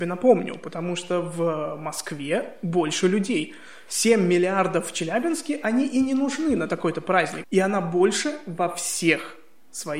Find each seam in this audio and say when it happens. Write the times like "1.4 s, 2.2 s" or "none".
7.4 s

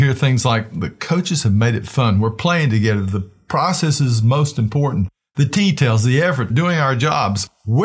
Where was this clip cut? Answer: 6.5 s

